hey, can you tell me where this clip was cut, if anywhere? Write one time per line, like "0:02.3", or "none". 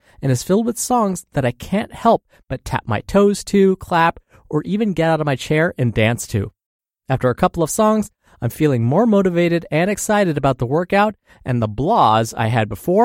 none